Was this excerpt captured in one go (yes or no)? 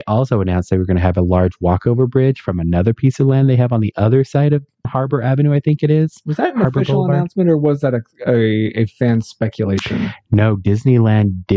no